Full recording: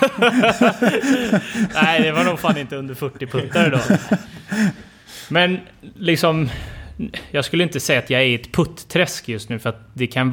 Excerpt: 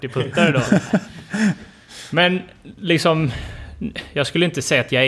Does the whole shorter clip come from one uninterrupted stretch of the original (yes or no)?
yes